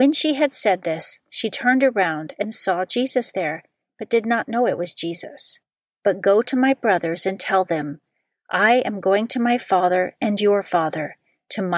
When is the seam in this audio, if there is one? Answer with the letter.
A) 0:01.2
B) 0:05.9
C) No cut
B